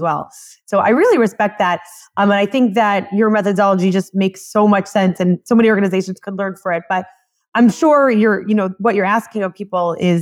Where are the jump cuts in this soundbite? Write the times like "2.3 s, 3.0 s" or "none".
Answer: none